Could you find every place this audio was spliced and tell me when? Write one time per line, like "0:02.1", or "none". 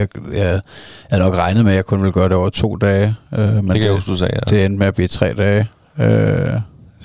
none